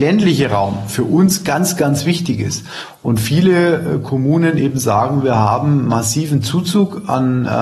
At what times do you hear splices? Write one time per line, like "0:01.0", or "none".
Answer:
none